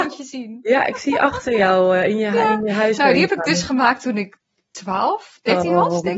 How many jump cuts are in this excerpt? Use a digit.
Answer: 0